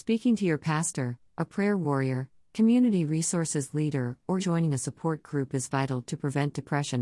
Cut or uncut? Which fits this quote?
cut